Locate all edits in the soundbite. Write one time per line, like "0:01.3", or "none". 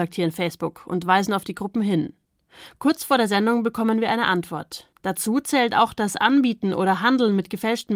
0:04.9